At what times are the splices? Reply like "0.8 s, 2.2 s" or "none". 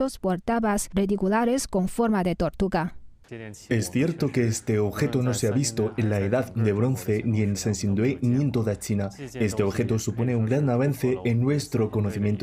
none